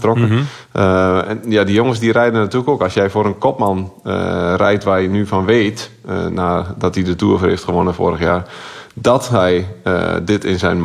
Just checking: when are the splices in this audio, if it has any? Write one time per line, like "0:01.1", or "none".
none